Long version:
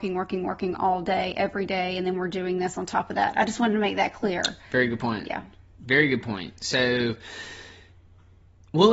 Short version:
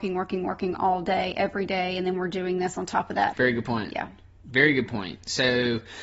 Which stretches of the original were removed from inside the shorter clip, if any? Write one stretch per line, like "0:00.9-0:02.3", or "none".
0:03.3-0:04.7